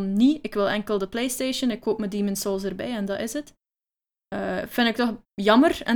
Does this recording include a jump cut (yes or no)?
no